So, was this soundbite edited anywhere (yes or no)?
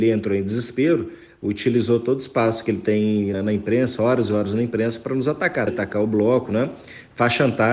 yes